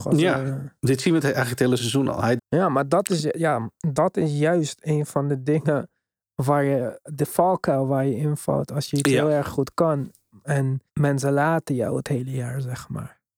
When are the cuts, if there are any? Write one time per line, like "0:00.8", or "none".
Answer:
0:02.4
0:10.9